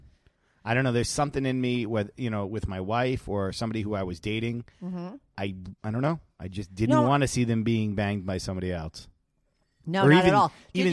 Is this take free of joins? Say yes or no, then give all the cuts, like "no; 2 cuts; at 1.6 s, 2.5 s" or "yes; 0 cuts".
no; 1 cut; at 5.8 s